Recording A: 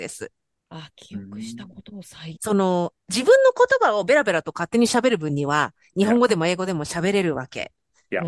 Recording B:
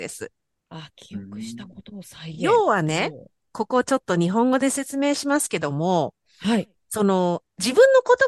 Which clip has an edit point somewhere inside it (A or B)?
A